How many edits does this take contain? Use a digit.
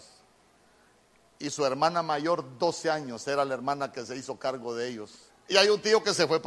1